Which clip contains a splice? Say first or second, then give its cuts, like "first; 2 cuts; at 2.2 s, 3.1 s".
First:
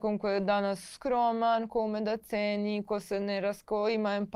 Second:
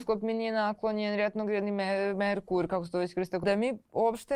second; 1 cut; at 3.4 s